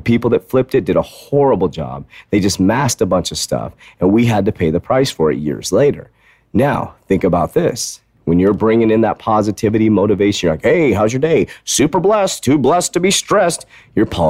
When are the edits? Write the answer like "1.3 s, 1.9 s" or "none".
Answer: none